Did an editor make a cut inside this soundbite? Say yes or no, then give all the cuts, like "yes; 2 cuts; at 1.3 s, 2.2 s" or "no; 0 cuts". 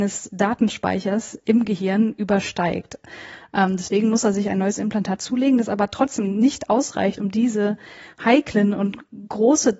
no; 0 cuts